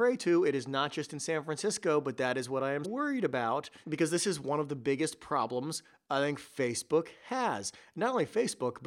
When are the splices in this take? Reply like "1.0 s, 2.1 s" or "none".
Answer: 2.8 s